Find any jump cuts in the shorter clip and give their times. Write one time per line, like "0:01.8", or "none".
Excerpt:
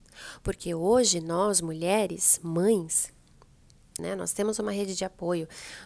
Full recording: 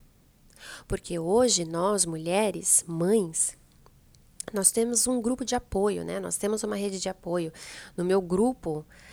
0:04.0